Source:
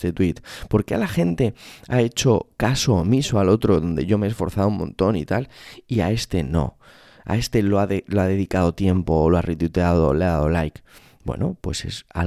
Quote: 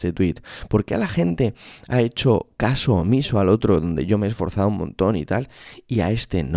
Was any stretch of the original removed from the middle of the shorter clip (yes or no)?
no